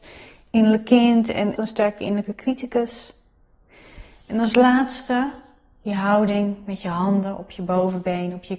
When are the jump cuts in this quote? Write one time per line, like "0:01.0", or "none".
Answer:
0:01.6